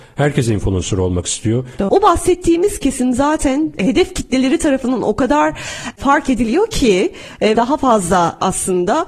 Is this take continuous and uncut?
no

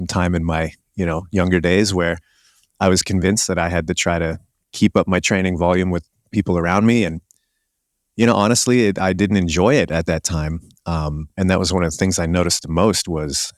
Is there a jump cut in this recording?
no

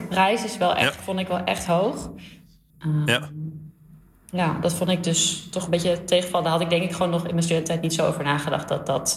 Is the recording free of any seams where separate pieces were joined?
no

